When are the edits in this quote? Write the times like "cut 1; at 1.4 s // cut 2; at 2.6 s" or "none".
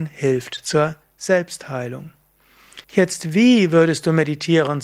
cut 1; at 2.8 s